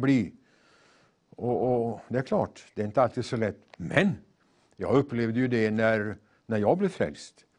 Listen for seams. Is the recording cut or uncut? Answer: uncut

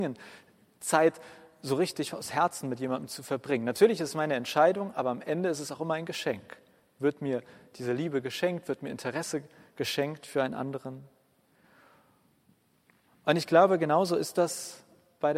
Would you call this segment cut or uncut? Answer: uncut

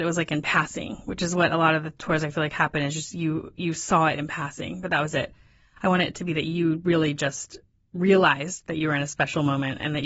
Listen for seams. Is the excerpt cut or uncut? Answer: uncut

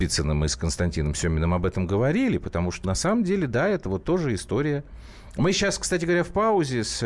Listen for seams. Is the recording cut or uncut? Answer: cut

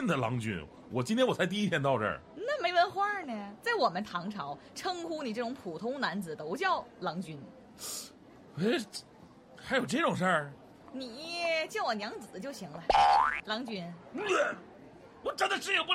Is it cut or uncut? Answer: cut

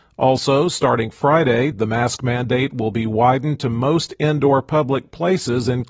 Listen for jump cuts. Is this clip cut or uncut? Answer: uncut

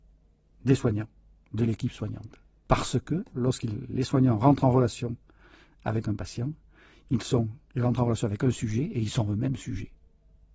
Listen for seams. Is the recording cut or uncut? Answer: cut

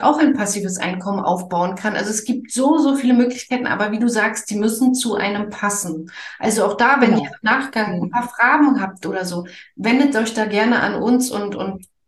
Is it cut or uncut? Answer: uncut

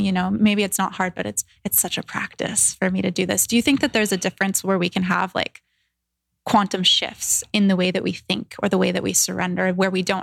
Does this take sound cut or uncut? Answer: uncut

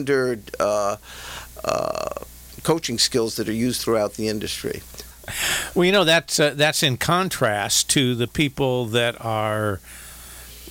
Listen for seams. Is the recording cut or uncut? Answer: cut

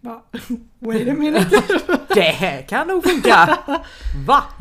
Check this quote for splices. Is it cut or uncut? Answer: uncut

